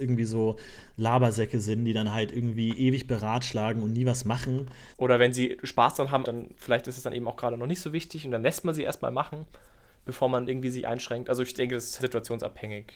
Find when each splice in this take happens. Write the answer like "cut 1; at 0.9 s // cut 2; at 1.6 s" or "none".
cut 1; at 4.9 s // cut 2; at 6.2 s // cut 3; at 12.0 s

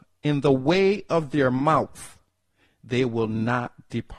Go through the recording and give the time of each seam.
cut 1; at 2.7 s

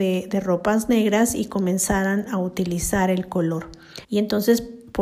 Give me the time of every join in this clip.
cut 1; at 4.0 s

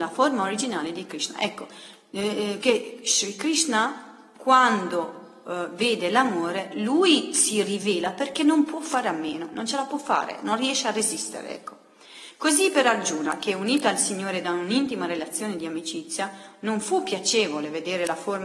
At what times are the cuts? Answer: cut 1; at 2.6 s

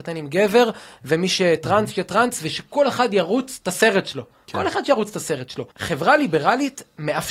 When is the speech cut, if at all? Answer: cut 1; at 5.7 s

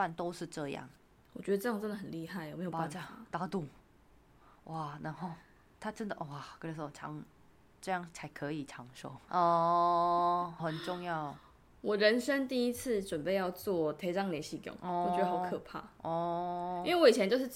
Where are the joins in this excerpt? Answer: cut 1; at 9.3 s // cut 2; at 10.6 s

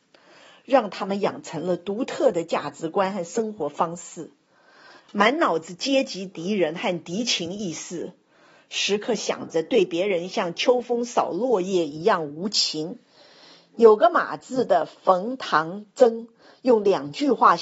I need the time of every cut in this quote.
cut 1; at 5.0 s

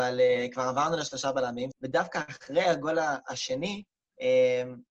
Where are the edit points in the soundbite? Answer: cut 1; at 1.7 s

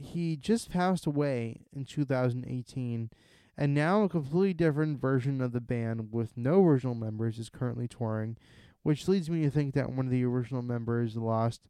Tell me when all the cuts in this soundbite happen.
none

